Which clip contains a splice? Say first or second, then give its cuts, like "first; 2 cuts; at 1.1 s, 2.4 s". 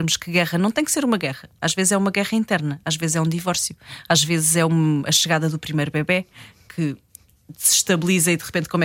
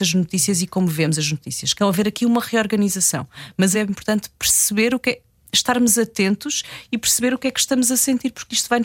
second; 2 cuts; at 1.7 s, 3.7 s